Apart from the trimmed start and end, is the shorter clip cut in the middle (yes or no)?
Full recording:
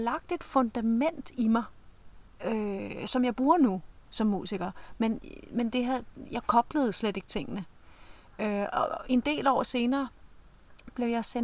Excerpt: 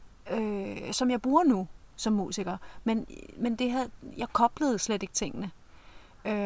no